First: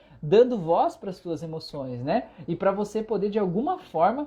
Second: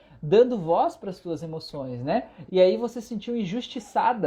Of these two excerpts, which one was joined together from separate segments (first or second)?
second